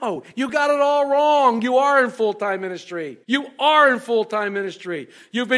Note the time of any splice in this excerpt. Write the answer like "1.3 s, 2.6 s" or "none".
3.2 s